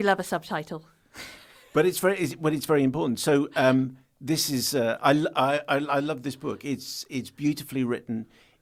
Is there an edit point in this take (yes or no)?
no